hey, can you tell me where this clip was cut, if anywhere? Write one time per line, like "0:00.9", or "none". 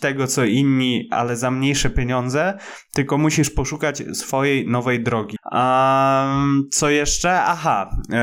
0:05.4